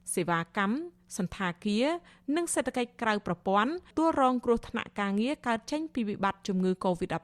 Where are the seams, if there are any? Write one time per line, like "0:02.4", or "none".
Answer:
0:03.9